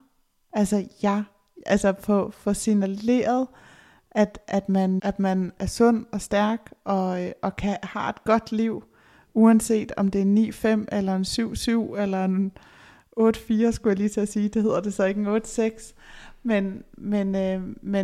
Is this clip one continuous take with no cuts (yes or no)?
no